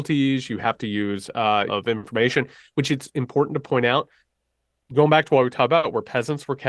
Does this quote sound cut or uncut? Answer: cut